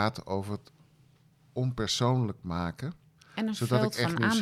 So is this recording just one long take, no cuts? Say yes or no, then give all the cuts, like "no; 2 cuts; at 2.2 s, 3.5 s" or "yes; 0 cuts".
yes; 0 cuts